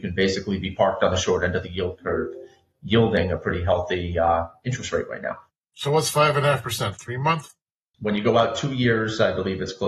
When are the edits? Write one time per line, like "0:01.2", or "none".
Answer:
0:07.9

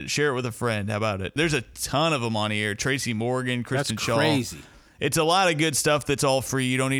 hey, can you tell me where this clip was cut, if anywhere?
0:01.4

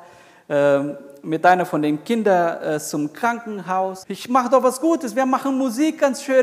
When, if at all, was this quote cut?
0:04.0

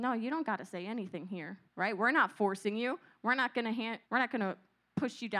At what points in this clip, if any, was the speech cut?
0:01.7
0:04.0

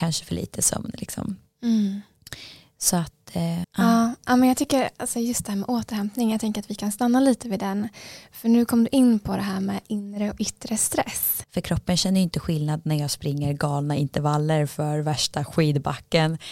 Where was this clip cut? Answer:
0:03.6
0:11.4

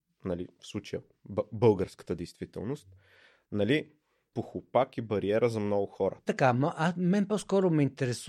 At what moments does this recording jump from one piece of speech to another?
0:04.3
0:06.3

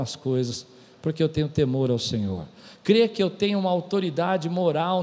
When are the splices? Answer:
none

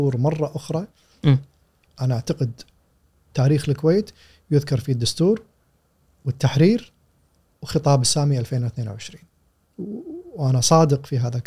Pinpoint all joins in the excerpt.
0:01.9

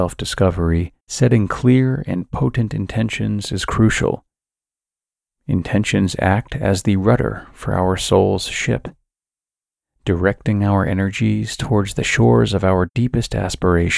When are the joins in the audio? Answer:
0:01.0

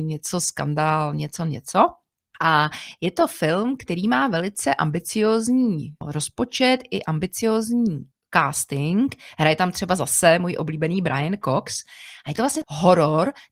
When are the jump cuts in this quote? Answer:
none

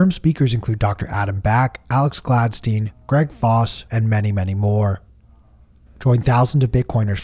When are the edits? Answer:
0:03.9
0:05.9

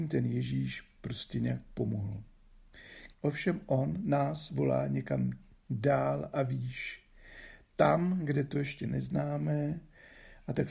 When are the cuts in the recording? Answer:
0:03.1

